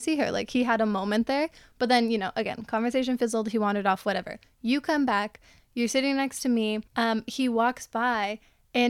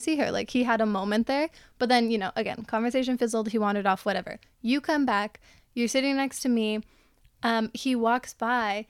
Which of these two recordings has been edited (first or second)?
first